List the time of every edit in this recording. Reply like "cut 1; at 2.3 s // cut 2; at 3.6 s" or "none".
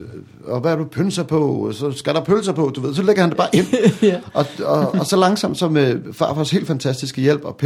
none